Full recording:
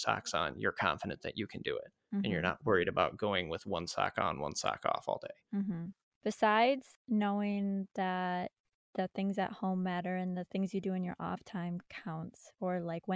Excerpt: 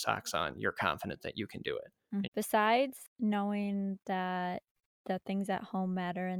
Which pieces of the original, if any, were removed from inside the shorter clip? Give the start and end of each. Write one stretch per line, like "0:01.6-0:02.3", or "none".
0:02.2-0:06.1